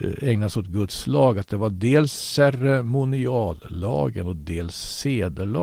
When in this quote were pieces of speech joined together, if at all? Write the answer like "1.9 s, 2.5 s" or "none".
none